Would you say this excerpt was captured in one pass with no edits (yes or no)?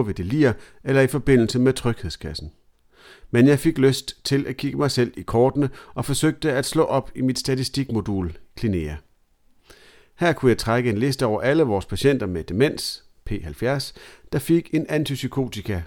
yes